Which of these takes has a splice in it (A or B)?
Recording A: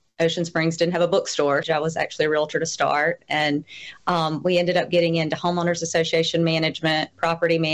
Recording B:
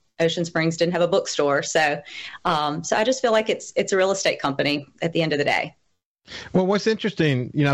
A